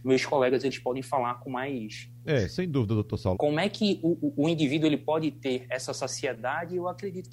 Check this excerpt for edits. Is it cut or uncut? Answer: cut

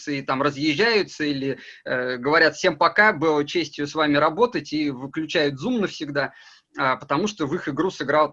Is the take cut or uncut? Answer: uncut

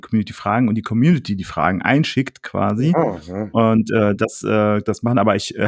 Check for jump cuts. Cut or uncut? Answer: uncut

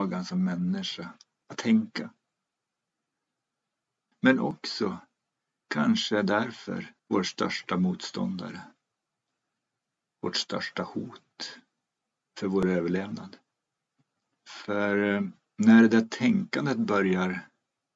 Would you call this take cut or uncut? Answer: cut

